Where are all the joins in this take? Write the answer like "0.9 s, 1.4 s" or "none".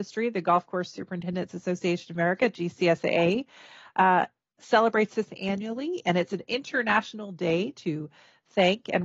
none